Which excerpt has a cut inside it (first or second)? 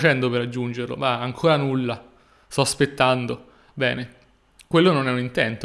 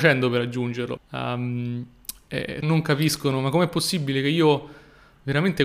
second